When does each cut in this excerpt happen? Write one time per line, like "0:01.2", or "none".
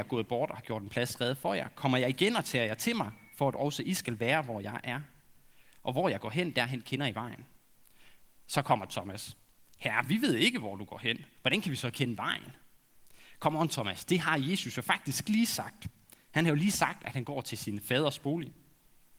none